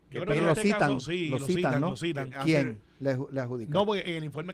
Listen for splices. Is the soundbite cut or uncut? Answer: cut